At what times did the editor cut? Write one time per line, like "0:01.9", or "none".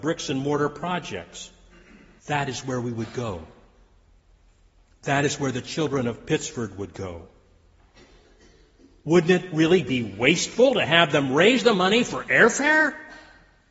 0:02.2

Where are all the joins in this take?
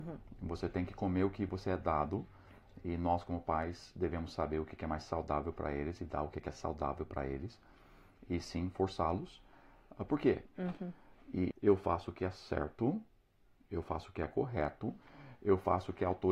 0:10.5
0:11.5

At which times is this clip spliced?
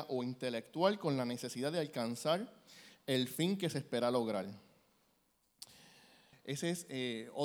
0:06.3

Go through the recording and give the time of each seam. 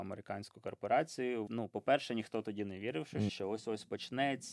0:01.5
0:03.3

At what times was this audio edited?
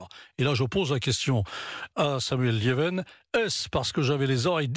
none

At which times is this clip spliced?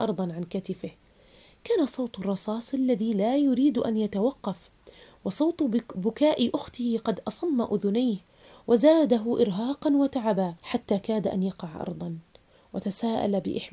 0:10.6

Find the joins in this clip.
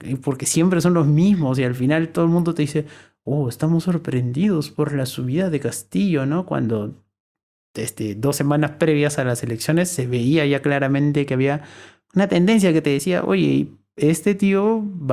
none

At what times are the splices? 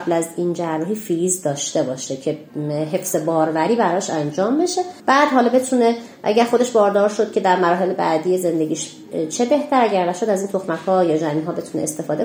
0:05.0

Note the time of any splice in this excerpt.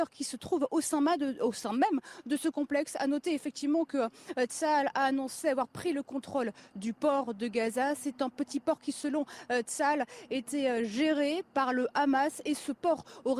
none

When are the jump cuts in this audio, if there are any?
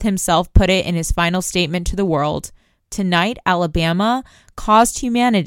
0:02.8

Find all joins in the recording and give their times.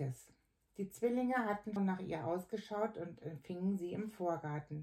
0:01.8

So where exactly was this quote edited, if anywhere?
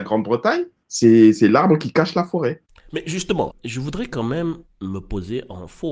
0:01.4

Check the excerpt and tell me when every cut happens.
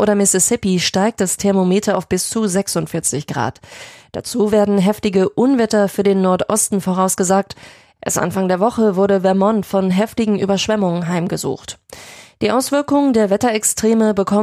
none

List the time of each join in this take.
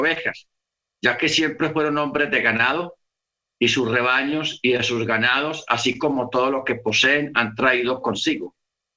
none

